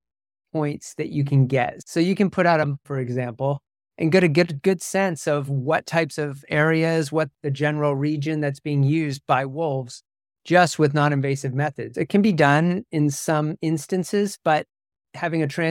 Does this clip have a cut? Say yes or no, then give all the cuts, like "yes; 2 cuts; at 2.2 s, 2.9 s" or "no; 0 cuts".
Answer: yes; 2 cuts; at 2.8 s, 11.9 s